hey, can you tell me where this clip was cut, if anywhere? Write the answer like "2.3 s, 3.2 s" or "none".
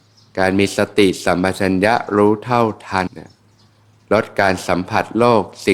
3.1 s